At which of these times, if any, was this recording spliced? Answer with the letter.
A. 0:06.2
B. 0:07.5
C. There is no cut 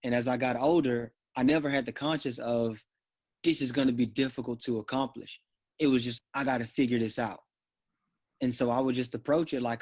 A